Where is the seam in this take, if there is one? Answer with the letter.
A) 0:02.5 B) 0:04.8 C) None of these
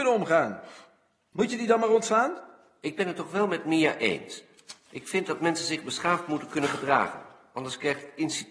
C